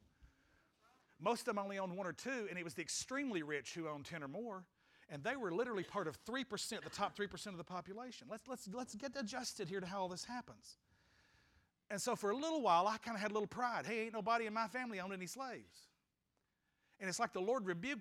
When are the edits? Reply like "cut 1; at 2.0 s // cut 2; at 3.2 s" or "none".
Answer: none